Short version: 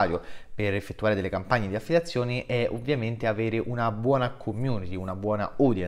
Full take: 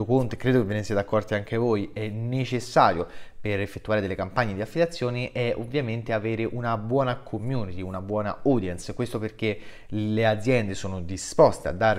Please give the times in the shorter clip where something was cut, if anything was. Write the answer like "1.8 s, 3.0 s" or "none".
none